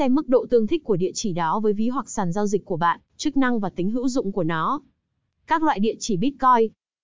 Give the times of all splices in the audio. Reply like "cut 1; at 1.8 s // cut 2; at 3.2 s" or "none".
cut 1; at 3.1 s